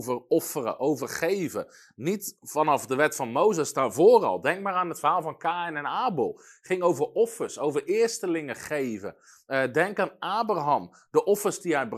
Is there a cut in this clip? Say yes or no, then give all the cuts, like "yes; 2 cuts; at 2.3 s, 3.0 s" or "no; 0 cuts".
no; 0 cuts